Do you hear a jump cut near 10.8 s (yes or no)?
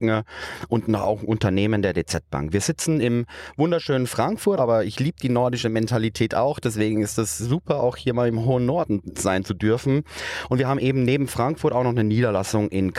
no